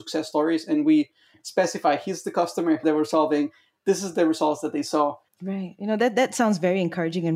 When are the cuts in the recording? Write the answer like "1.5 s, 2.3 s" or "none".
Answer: 2.8 s, 5.3 s